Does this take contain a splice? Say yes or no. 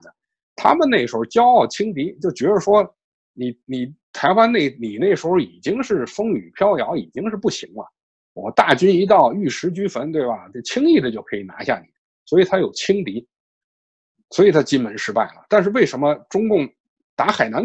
no